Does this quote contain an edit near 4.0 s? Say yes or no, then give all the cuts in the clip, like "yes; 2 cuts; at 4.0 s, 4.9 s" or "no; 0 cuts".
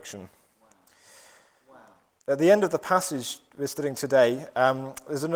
no; 1 cut; at 2.2 s